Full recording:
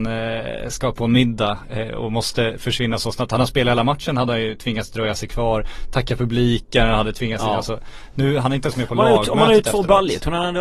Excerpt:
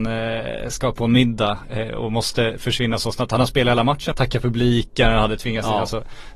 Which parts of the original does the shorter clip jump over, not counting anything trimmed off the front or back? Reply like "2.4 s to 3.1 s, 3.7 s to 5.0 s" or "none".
4.1 s to 5.9 s